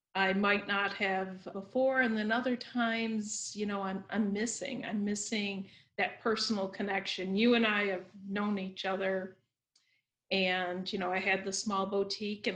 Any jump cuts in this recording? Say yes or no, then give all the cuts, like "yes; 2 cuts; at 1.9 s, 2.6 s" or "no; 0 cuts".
yes; 1 cut; at 1.5 s